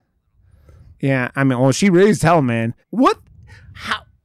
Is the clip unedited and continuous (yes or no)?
no